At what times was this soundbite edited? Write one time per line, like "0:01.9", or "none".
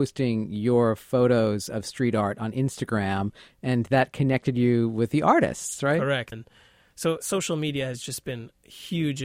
0:06.3